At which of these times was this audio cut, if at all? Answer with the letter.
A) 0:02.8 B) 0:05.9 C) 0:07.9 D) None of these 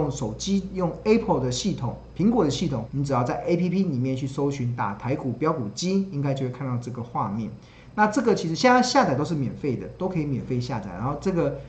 A